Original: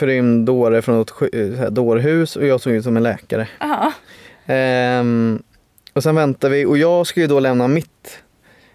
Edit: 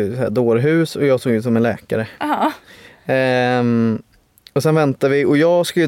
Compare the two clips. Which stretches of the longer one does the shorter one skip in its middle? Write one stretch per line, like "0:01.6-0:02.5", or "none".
none